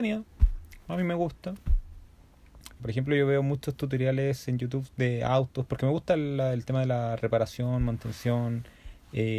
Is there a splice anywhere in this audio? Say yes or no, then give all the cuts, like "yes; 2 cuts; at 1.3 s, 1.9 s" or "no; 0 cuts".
yes; 1 cut; at 2.8 s